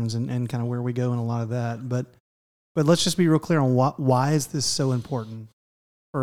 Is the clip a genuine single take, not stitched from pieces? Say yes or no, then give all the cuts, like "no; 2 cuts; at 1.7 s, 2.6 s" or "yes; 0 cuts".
yes; 0 cuts